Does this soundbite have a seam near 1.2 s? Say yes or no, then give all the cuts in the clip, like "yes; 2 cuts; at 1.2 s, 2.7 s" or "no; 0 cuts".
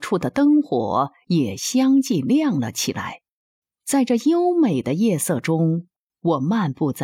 no; 1 cut; at 3.6 s